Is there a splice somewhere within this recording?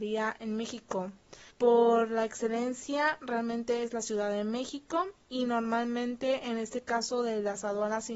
yes; 1 cut; at 1.5 s

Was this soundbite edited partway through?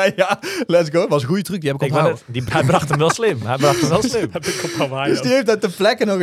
yes; 1 cut; at 2.5 s

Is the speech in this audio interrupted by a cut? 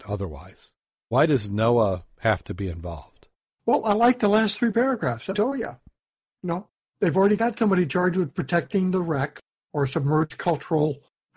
yes; 1 cut; at 5.3 s

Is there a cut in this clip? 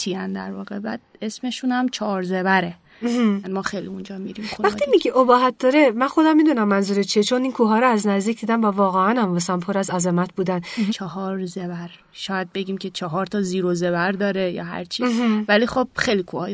yes; 2 cuts; at 3.4 s, 10.9 s

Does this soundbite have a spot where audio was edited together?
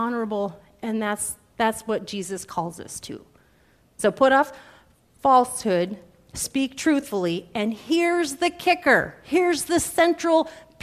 no; 0 cuts

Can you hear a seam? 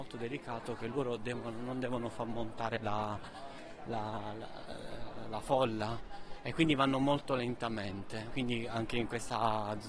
yes; 1 cut; at 8.3 s

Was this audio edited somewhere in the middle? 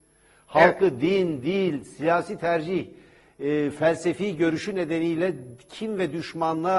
no; 0 cuts

